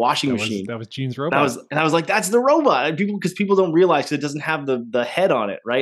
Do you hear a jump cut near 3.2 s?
no; 0 cuts

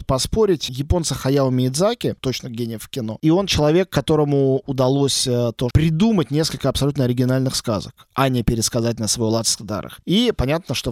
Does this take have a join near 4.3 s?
no; 3 cuts; at 2.2 s, 5.7 s, 10.0 s

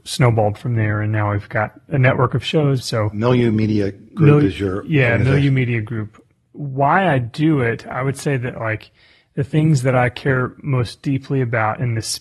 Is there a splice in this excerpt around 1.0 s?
no; 1 cut; at 2.8 s

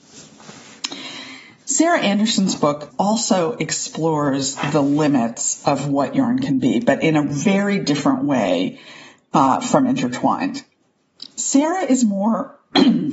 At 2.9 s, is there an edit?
yes; 1 cut; at 2.9 s

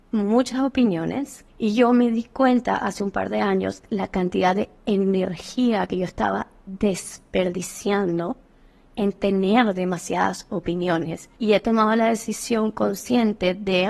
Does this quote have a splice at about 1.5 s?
yes; 2 cuts; at 1.5 s, 11.4 s

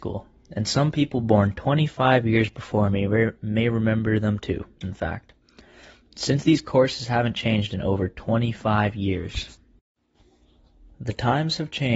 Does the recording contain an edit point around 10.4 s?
no; 1 cut; at 4.8 s

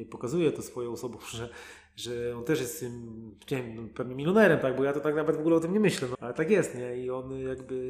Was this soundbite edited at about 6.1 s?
yes; 1 cut; at 6.1 s

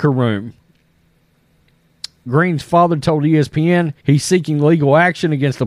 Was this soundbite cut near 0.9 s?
no; 2 cuts; at 2.3 s, 4.0 s

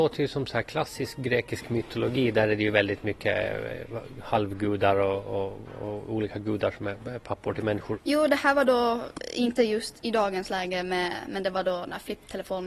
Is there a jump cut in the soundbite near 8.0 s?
yes; 1 cut; at 8.0 s

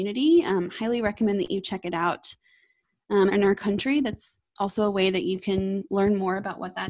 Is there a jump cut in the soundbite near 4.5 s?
yes; 2 cuts; at 3.3 s, 4.5 s

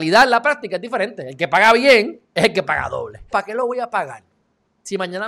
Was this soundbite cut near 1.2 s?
no; 1 cut; at 3.3 s

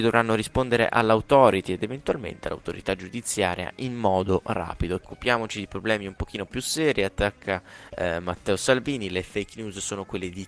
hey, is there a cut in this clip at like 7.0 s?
no; 1 cut; at 5.0 s

